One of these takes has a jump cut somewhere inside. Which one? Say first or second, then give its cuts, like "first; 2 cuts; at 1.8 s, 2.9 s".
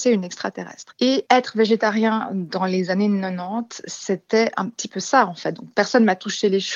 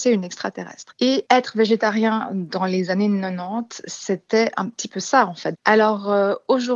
second; 1 cut; at 5.5 s